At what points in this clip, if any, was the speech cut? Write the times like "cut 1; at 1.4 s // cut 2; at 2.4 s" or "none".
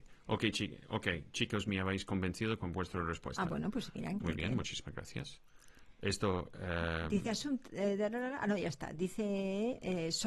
cut 1; at 4.2 s